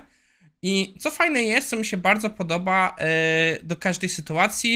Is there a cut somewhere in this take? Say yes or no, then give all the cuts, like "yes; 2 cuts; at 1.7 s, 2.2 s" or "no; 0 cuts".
no; 0 cuts